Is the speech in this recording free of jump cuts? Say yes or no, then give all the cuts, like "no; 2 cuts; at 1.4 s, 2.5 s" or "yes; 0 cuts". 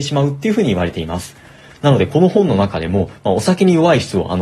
yes; 0 cuts